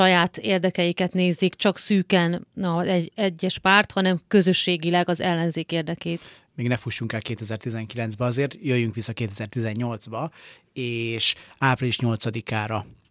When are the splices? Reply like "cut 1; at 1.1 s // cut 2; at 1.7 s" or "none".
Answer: none